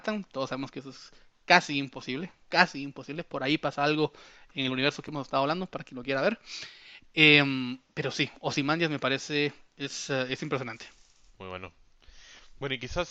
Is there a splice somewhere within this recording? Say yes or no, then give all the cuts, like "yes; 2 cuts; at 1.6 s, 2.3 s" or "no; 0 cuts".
no; 0 cuts